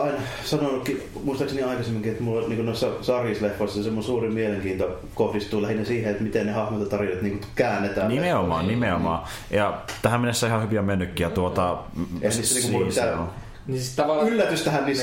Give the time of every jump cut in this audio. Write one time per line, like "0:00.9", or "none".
none

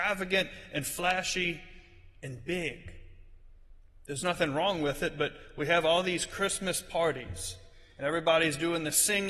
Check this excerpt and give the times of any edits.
none

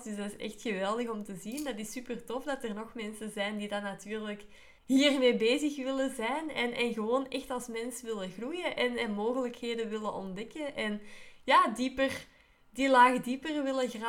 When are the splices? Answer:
0:04.8

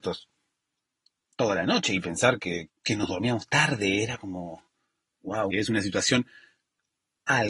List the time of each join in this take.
0:02.7
0:05.5

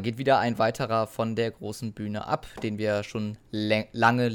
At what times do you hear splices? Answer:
none

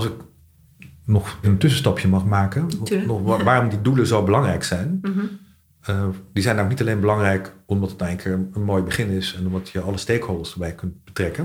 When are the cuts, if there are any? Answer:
0:01.4

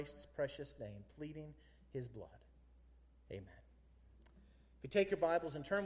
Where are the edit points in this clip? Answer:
none

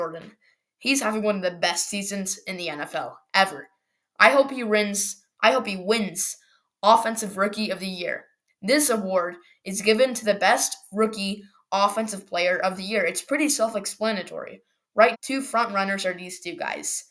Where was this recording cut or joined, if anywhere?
0:08.5
0:15.1

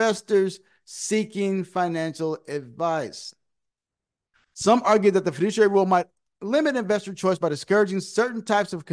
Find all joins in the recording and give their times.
0:04.3

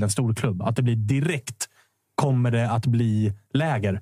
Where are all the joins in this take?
none

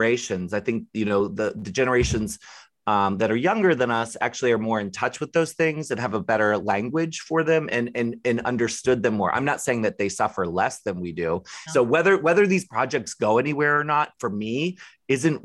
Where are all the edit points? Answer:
0:11.7

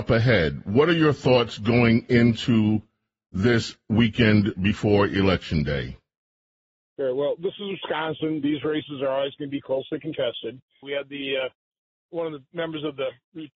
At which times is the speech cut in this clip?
0:10.8
0:12.1

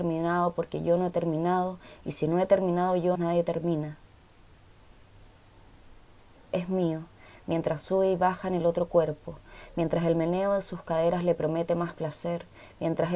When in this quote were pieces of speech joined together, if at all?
0:03.1
0:06.4

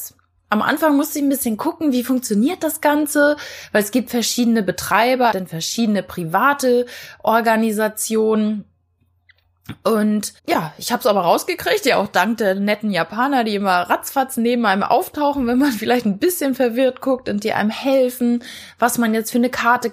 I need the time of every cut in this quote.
0:05.3
0:10.4

